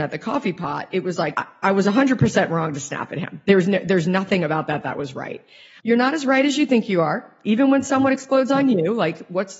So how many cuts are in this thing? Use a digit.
2